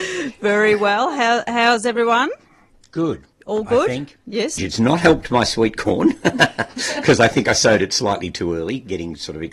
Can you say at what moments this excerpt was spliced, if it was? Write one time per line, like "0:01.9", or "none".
0:03.3
0:04.6